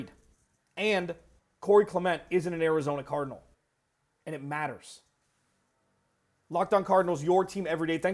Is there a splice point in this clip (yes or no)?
no